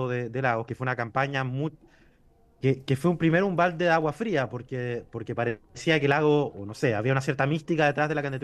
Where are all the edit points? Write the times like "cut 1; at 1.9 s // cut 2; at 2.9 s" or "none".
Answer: cut 1; at 2.6 s

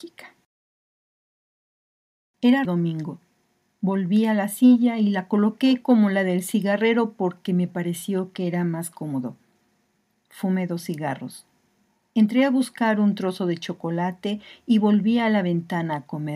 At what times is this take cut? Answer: cut 1; at 2.6 s

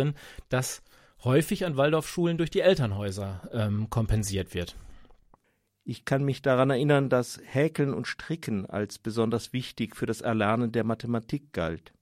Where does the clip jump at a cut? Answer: none

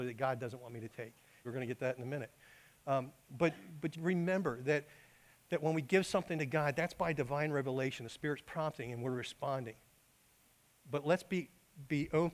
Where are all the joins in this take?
cut 1; at 1.4 s // cut 2; at 3.9 s

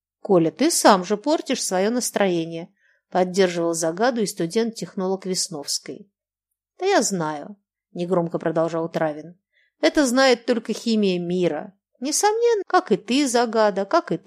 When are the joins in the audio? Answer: cut 1; at 12.6 s

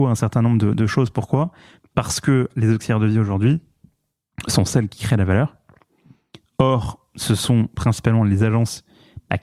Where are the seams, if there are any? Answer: none

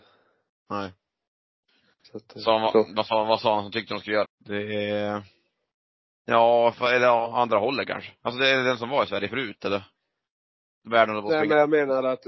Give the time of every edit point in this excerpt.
cut 1; at 4.2 s

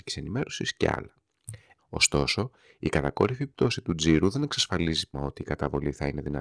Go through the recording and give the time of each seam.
cut 1; at 1.8 s // cut 2; at 5.1 s

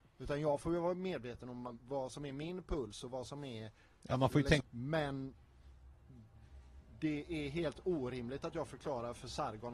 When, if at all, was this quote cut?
cut 1; at 4.6 s

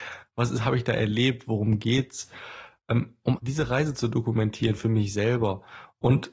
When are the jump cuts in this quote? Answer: cut 1; at 3.4 s

